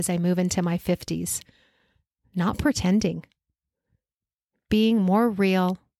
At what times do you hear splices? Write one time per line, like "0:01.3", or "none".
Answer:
none